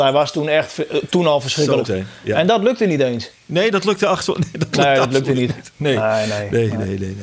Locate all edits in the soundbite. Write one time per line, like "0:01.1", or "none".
0:01.8